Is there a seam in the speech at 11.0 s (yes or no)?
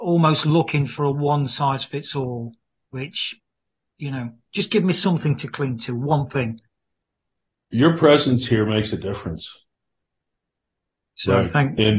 yes